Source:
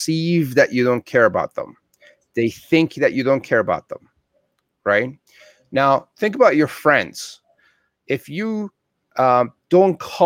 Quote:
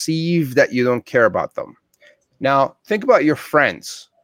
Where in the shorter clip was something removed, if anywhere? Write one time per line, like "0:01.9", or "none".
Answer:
0:02.3